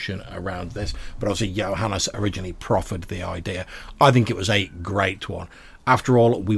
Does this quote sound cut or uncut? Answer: uncut